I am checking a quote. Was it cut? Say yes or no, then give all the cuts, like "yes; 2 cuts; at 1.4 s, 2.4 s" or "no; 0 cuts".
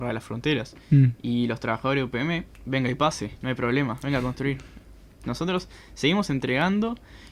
no; 0 cuts